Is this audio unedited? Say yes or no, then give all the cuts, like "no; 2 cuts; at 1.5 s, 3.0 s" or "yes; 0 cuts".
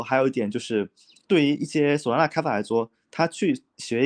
yes; 0 cuts